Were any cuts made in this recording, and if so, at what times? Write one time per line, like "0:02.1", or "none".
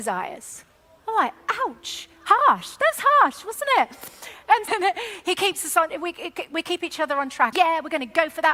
0:04.7
0:07.5